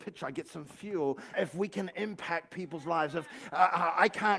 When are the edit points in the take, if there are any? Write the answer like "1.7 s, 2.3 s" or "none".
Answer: 1.3 s